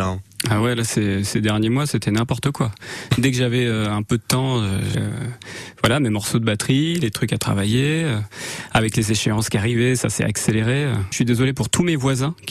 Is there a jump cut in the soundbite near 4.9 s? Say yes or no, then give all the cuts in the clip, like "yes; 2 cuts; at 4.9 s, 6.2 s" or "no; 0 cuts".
yes; 2 cuts; at 4.9 s, 11.1 s